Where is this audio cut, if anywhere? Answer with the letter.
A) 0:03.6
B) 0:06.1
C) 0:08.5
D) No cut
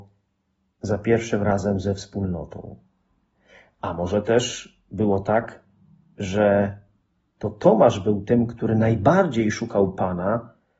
D